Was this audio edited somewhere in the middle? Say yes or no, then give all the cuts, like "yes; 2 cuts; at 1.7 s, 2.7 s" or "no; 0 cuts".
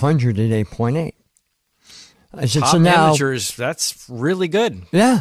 no; 0 cuts